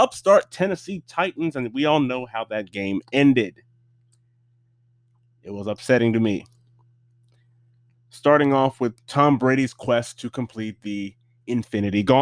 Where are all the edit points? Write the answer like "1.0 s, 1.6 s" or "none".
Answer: 7.9 s, 9.0 s